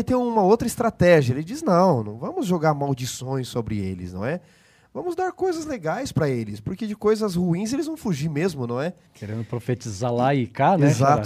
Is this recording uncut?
no; 1 cut; at 9.1 s

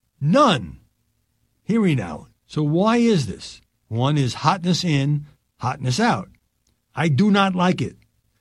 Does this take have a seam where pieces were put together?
yes; 3 cuts; at 2.3 s, 3.9 s, 6.9 s

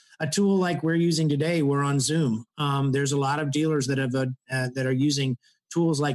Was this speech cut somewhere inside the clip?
no; 0 cuts

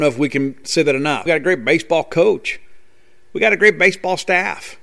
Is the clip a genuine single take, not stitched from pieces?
no; 1 cut; at 1.3 s

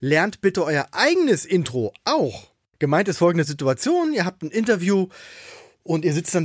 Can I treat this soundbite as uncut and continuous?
yes; 0 cuts

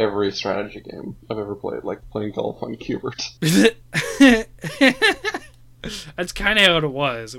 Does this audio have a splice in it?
yes; 1 cut; at 3.4 s

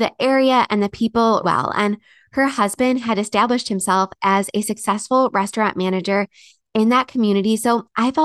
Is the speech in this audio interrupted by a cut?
yes; 1 cut; at 1.4 s

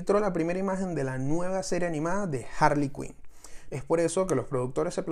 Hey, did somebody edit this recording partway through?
yes; 1 cut; at 3.7 s

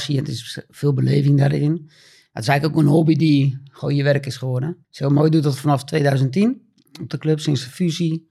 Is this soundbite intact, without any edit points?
no; 1 cut; at 4.8 s

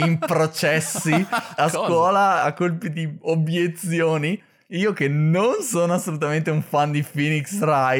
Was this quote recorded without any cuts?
yes; 0 cuts

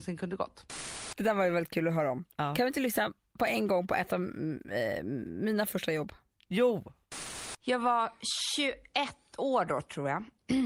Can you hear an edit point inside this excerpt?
no; 0 cuts

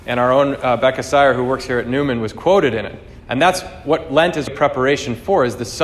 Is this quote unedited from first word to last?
no; 2 cuts; at 3.2 s, 4.5 s

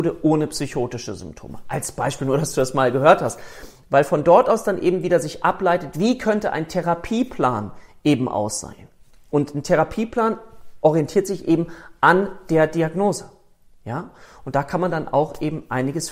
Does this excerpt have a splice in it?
no; 0 cuts

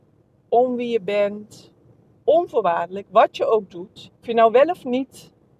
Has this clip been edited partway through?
yes; 2 cuts; at 2.2 s, 4.2 s

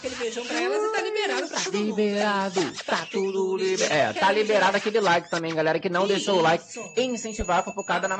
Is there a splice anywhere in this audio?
no; 0 cuts

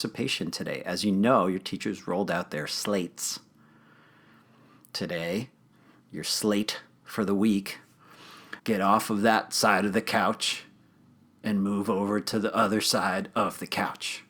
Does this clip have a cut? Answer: yes; 1 cut; at 8.6 s

